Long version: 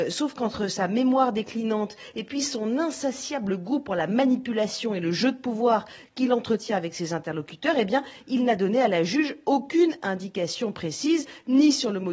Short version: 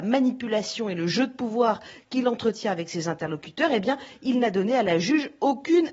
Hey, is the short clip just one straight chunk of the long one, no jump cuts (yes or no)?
yes